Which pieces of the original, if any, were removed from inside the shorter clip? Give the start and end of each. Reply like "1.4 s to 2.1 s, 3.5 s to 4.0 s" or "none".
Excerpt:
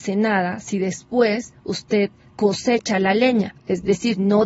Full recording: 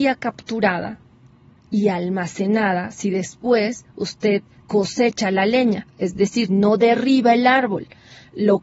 none

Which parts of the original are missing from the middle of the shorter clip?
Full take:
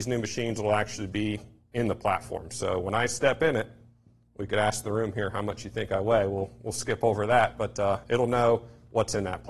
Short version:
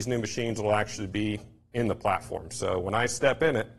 none

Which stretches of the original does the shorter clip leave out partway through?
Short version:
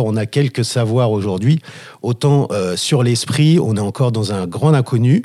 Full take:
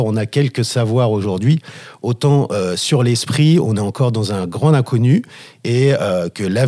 none

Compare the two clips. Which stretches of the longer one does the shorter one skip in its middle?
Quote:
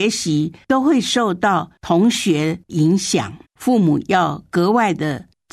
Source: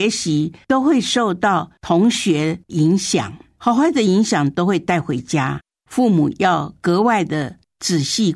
3.4 s to 5.8 s

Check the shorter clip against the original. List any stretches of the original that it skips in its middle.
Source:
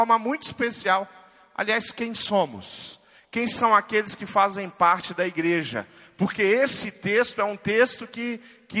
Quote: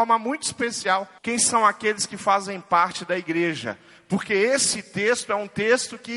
1.2 s to 3.3 s

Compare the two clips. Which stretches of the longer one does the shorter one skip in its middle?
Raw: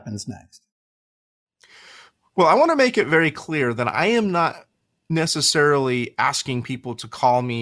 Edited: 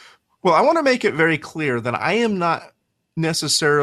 none

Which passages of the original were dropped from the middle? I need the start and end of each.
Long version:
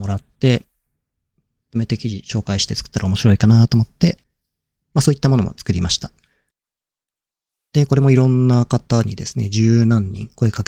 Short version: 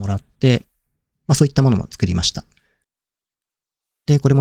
1.1 s to 4.8 s

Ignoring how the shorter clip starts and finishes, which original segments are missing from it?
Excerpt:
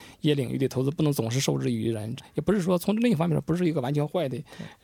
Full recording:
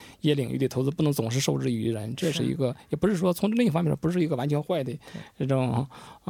2.2 s to 2.7 s

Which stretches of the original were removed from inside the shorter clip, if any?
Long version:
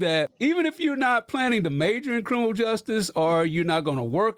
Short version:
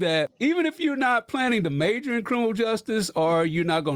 none

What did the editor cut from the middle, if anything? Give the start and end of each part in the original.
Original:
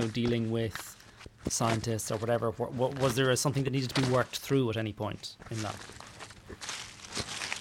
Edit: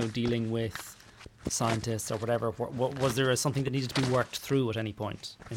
none

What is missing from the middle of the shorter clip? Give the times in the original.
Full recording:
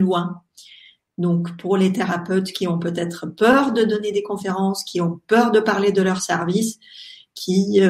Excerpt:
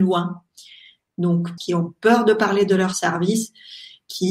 1.6 s to 4.8 s

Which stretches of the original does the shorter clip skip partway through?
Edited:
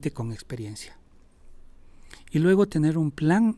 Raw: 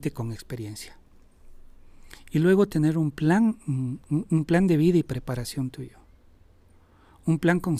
none

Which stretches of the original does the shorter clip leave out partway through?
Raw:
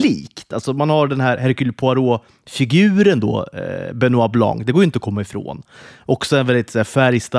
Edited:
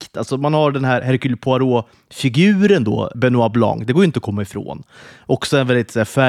3.5 s to 3.9 s

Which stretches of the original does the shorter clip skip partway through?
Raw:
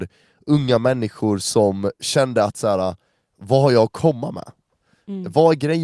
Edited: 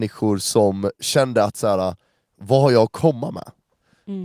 none

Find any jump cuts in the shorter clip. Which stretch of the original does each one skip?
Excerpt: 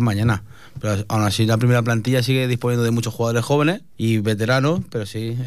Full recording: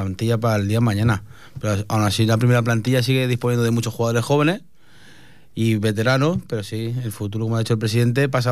4.7 s to 5.5 s

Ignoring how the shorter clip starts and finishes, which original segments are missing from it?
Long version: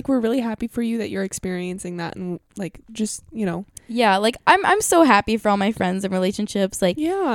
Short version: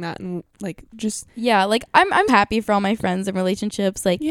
3.2 s to 3.8 s, 4.8 s to 5.0 s

